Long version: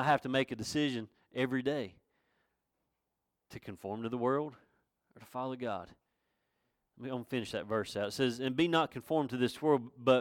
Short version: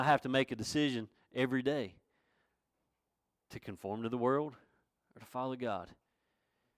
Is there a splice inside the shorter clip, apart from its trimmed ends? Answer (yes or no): no